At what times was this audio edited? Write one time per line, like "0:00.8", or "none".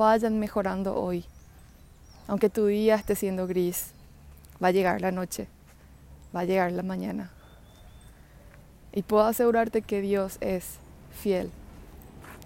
none